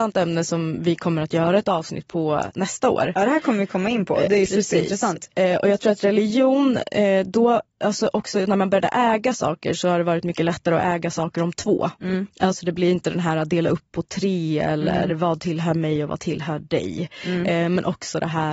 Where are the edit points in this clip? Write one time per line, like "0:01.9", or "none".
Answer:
none